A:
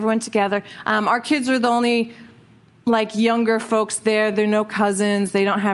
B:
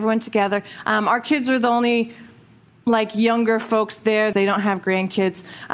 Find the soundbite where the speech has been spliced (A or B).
B